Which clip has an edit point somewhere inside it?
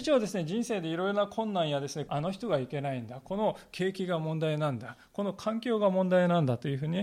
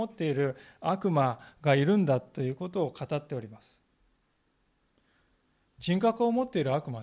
first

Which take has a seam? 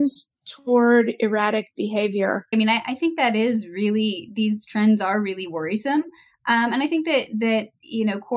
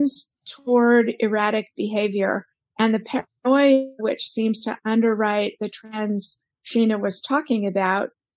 first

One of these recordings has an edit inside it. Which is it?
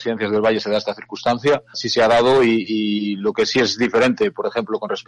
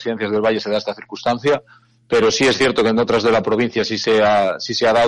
first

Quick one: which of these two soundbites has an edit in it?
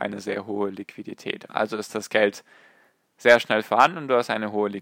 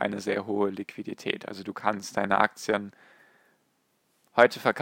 first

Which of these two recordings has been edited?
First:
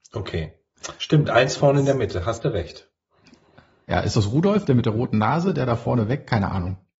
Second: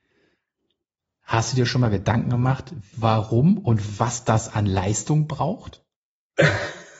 second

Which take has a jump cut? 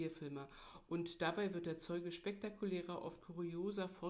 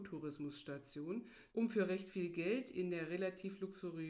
second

